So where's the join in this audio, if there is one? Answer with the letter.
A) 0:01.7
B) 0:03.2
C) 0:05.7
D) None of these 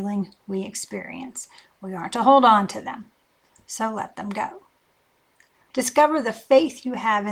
C